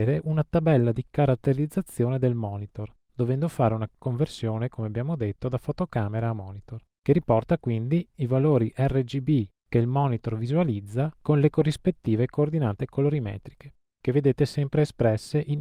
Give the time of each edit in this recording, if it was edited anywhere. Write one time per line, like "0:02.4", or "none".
none